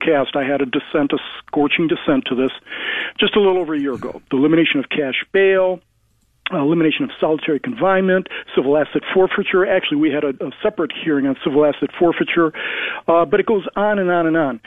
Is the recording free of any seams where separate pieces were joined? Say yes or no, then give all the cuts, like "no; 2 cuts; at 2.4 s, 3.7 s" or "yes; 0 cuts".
yes; 0 cuts